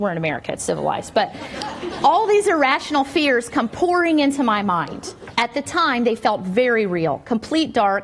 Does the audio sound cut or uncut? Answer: uncut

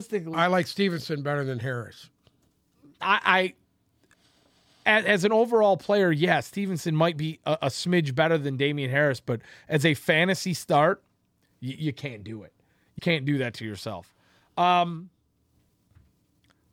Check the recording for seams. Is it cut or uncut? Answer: cut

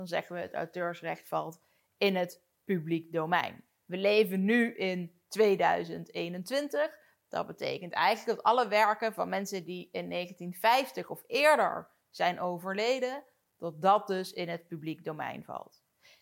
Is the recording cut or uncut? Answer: uncut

